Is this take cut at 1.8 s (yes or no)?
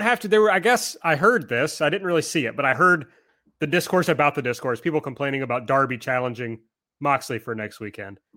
no